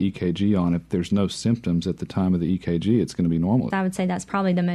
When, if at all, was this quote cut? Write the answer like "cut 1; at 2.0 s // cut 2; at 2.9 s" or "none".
cut 1; at 3.7 s